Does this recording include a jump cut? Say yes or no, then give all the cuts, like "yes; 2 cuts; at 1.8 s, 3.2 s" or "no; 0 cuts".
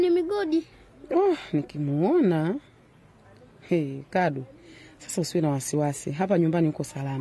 no; 0 cuts